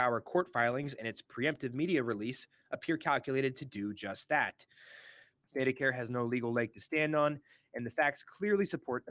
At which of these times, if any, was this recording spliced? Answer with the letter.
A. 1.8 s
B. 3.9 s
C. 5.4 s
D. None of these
C